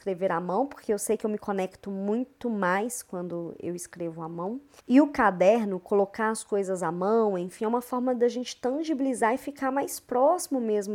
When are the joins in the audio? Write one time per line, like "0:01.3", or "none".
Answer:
0:04.8